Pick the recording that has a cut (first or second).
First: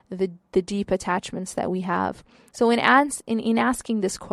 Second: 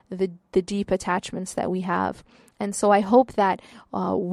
first